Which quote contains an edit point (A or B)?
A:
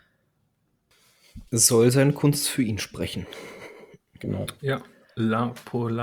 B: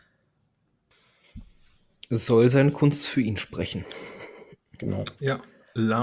A